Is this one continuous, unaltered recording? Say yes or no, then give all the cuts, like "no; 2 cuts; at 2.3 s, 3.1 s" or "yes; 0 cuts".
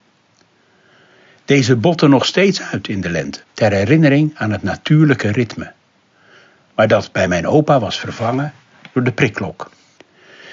no; 1 cut; at 3.4 s